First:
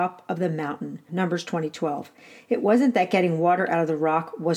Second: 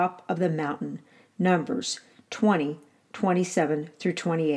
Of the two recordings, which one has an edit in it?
first; 1 cut; at 1.1 s

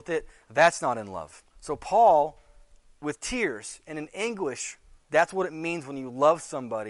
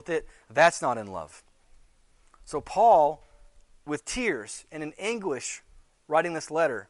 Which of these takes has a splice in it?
first; 2 cuts; at 1.5 s, 5.1 s

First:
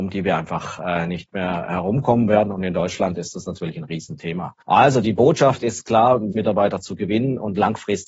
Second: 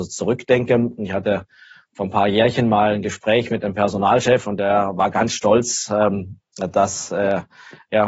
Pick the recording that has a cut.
first; 2 cuts; at 4.6 s, 6.3 s

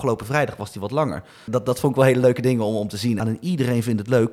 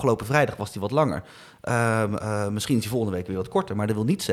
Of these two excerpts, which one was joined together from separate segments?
first; 2 cuts; at 1.5 s, 3.2 s

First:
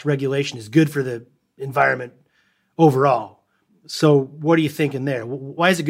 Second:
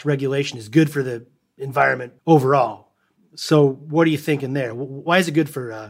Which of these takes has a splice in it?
second; 1 cut; at 2.2 s

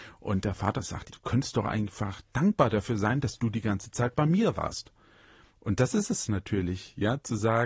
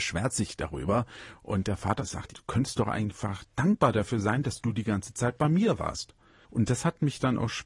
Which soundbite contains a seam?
second; 1 cut; at 6.4 s

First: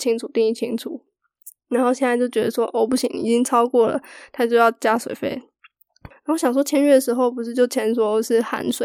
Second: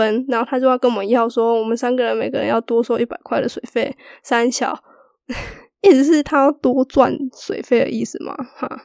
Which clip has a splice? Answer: first; 2 cuts; at 1.6 s, 6.1 s

